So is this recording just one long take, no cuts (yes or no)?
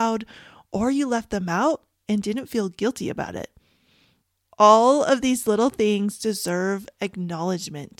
yes